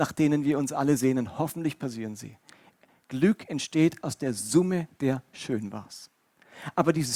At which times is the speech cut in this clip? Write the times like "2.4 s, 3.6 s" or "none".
none